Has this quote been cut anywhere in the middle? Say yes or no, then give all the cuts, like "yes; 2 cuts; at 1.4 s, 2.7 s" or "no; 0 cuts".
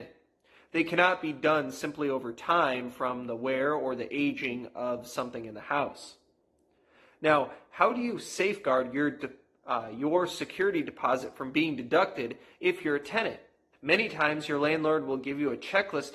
yes; 1 cut; at 13.7 s